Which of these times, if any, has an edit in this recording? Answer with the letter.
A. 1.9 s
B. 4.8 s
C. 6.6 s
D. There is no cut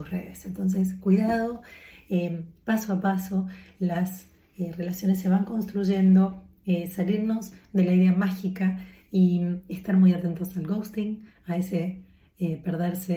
D